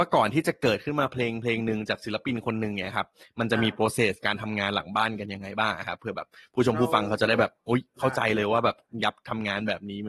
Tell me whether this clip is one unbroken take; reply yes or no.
yes